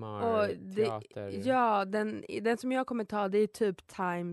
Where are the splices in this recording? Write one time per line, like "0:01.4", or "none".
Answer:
none